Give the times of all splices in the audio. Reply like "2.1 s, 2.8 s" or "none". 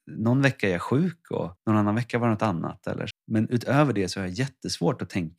1.6 s, 3.1 s